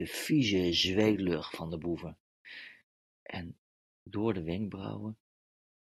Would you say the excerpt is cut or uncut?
cut